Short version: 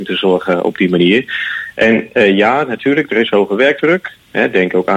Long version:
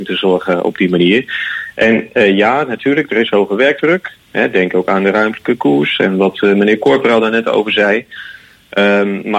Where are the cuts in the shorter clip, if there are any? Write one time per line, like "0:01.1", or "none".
none